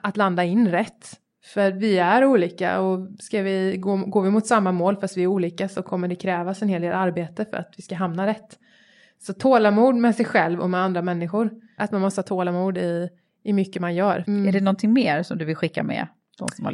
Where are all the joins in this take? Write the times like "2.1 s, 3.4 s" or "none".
11.8 s, 14.2 s